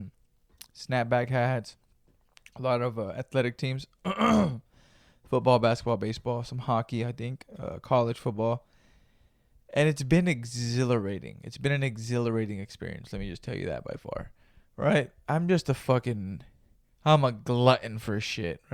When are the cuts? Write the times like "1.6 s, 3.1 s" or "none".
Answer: none